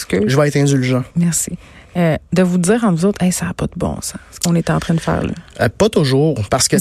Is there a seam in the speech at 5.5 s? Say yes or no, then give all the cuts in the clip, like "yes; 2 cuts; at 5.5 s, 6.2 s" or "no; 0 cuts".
no; 0 cuts